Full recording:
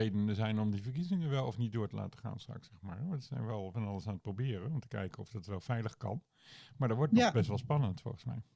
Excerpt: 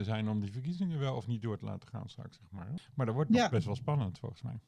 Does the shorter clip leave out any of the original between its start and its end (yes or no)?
yes